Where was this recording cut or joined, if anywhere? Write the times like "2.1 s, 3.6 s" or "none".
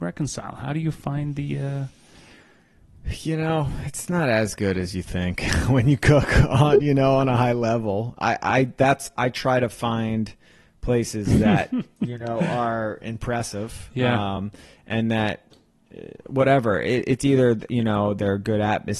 none